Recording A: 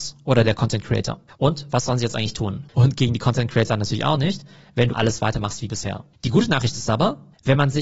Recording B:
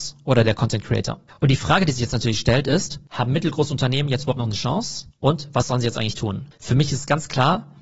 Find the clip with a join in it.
A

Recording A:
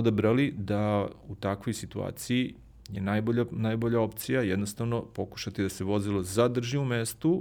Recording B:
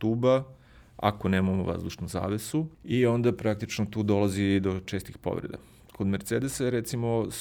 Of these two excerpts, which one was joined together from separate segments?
B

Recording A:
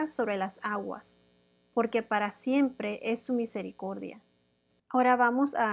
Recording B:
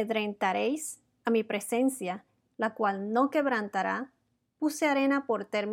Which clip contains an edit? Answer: B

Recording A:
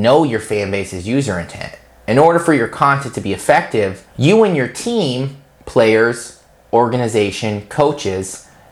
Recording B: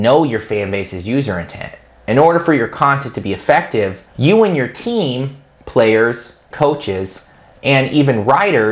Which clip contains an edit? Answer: B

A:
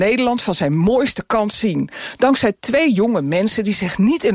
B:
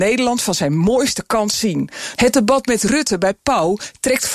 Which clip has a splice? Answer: B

